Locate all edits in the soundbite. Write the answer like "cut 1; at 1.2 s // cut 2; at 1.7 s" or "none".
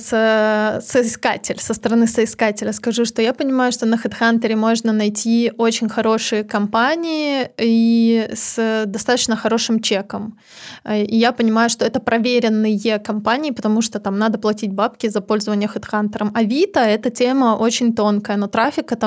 none